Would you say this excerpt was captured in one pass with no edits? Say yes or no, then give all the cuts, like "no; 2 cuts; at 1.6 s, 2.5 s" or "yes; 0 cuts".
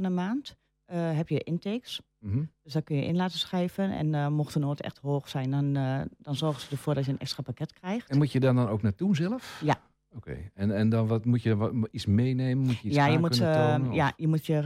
yes; 0 cuts